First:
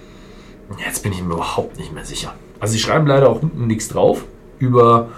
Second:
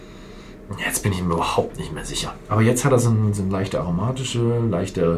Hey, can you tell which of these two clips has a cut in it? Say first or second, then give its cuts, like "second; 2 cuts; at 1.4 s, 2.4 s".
second; 1 cut; at 2.4 s